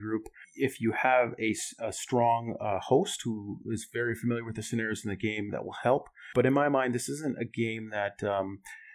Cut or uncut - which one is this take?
uncut